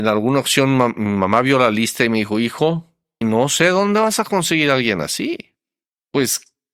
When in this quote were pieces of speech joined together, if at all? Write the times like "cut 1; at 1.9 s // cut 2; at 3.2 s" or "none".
cut 1; at 3.2 s